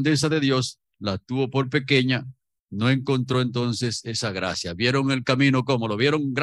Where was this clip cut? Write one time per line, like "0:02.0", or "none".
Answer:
none